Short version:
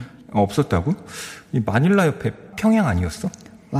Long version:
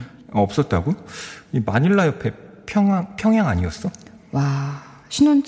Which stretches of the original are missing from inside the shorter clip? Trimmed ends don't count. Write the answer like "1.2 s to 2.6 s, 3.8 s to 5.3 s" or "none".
2.5 s to 3.1 s